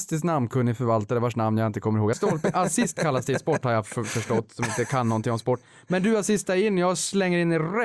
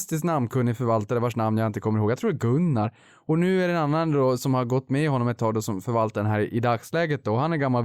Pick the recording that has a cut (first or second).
first